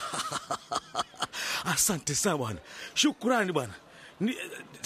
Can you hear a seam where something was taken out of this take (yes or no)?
no